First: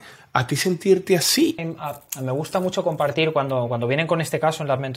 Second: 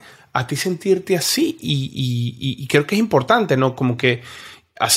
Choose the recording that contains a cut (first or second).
first